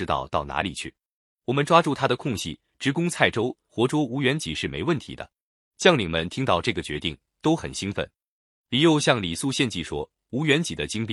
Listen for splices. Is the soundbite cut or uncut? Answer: cut